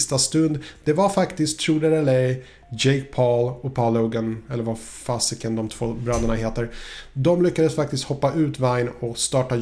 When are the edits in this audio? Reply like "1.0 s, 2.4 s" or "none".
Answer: none